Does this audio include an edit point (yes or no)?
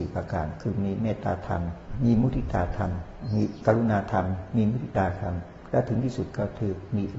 no